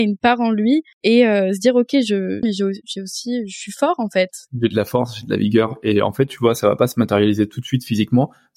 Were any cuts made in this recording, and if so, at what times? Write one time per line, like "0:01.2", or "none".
0:00.9
0:02.4